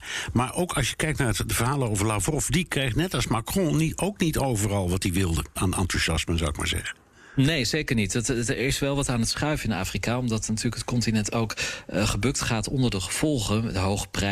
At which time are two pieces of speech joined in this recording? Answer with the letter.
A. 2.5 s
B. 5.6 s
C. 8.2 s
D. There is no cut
B